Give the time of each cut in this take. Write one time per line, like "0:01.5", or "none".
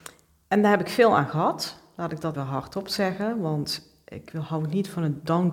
0:02.3

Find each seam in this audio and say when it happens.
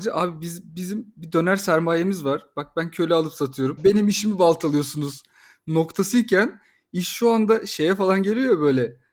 0:03.8

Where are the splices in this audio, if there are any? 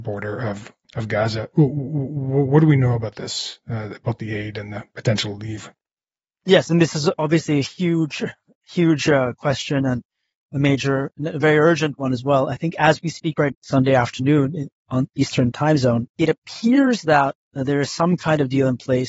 0:13.5
0:16.1

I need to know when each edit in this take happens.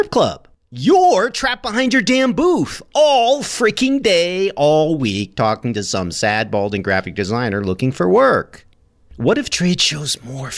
0:09.0

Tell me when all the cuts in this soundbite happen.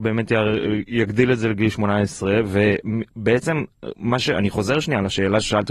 none

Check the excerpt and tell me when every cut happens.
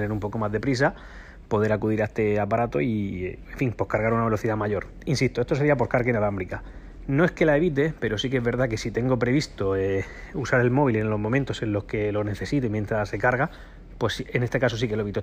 none

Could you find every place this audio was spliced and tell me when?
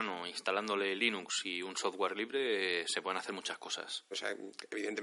0:04.1

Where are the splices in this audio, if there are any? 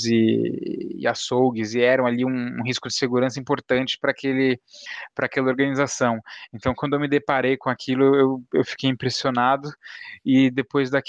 none

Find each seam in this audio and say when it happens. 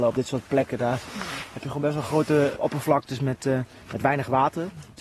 0:02.6

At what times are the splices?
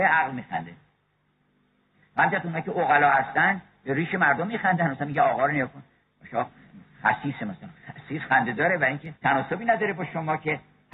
0:07.8
0:09.2

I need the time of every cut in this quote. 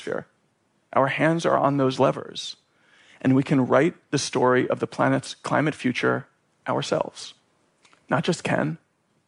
none

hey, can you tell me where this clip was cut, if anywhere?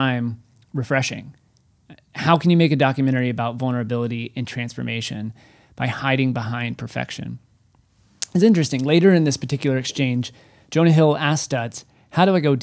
none

